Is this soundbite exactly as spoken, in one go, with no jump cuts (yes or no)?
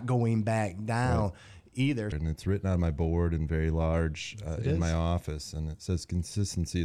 no